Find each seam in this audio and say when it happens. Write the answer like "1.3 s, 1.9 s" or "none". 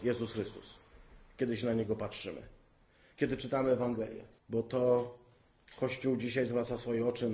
4.4 s